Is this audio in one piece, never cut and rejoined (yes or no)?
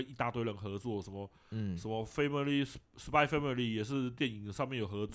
yes